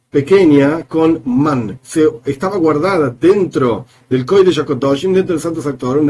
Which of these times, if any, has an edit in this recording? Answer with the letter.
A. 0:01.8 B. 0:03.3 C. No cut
A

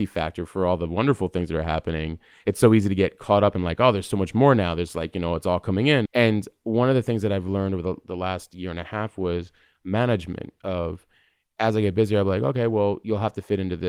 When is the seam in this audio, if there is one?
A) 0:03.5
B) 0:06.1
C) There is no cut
B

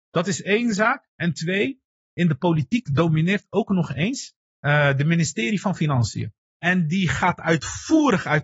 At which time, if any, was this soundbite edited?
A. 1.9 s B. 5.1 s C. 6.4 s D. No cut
C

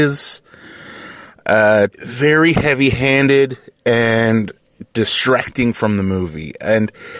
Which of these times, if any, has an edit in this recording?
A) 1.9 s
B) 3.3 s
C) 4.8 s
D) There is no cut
A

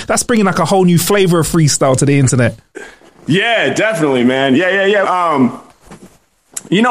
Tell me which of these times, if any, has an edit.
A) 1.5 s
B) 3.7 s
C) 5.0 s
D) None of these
C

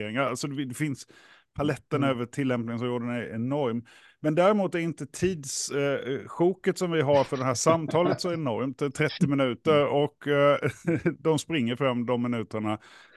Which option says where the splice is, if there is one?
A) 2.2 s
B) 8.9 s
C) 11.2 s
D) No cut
C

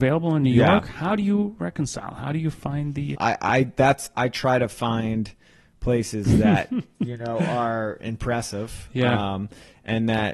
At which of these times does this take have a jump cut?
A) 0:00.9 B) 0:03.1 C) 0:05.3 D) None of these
B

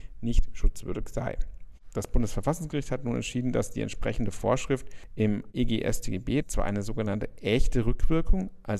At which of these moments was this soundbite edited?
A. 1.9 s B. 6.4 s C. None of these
B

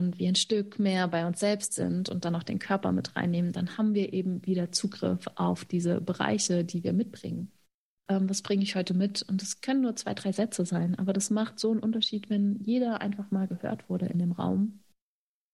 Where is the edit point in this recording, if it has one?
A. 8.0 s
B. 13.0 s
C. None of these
A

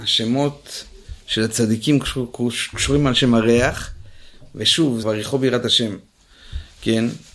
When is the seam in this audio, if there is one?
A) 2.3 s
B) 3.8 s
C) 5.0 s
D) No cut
C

